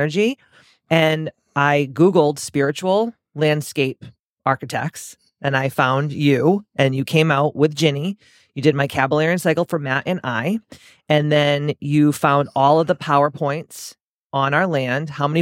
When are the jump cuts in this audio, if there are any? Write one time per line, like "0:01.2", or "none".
none